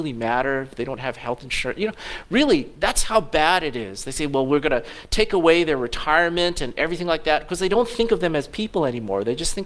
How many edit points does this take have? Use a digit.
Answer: 0